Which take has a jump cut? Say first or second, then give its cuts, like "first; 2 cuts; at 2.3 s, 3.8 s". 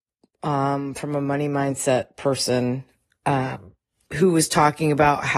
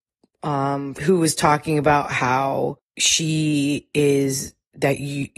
second; 2 cuts; at 0.9 s, 2.9 s